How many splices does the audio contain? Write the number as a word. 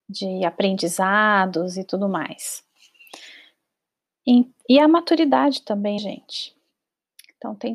one